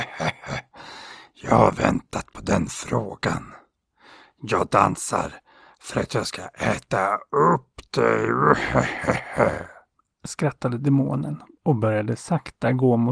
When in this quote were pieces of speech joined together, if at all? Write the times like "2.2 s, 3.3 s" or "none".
none